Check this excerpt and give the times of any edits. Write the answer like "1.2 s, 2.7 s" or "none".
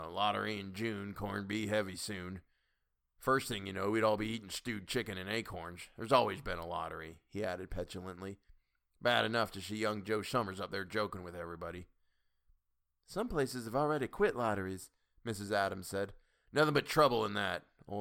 none